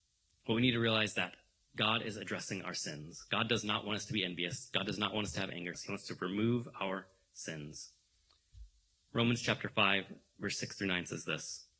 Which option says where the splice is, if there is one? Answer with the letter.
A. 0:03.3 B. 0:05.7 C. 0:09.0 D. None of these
B